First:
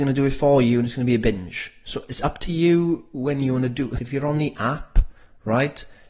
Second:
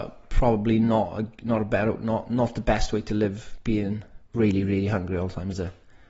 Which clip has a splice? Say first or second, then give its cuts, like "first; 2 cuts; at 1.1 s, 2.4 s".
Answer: first; 1 cut; at 4.0 s